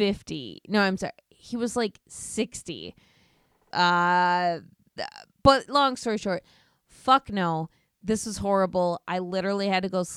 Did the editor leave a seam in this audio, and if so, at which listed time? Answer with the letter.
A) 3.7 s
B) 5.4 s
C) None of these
A